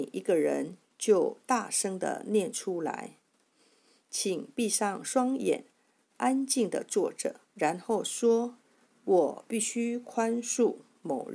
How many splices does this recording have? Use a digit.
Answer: 1